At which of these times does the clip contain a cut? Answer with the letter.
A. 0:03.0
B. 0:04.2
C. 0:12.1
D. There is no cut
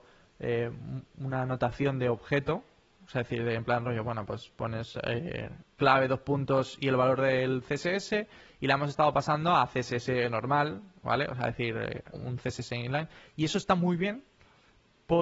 C